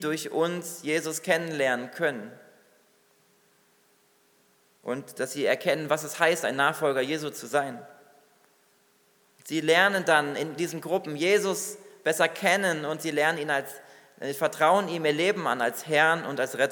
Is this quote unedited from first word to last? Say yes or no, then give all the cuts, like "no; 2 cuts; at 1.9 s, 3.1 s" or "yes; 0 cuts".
yes; 0 cuts